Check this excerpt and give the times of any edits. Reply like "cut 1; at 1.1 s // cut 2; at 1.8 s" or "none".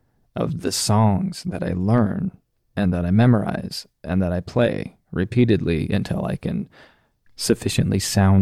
none